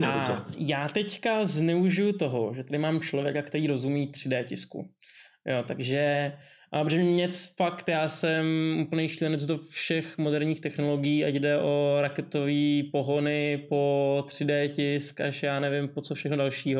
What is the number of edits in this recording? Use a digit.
0